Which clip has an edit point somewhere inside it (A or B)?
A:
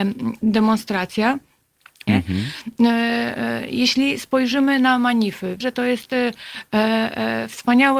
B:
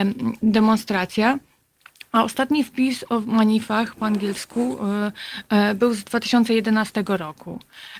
A